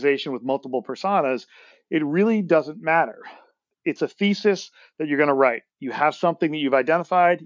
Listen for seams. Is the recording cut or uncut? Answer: cut